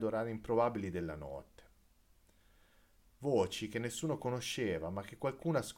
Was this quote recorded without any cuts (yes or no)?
yes